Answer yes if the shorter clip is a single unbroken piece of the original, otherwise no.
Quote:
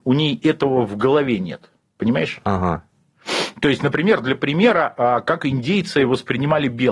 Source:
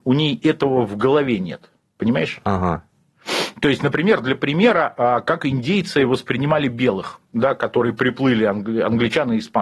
yes